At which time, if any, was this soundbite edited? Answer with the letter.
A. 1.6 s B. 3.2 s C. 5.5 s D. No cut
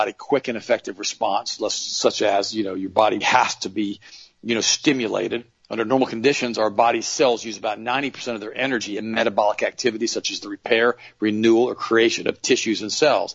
B